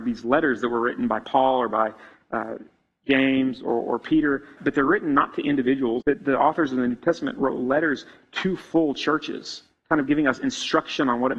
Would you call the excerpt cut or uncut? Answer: cut